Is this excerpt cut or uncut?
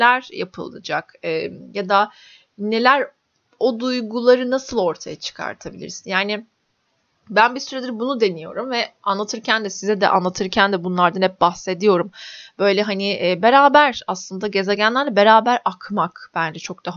uncut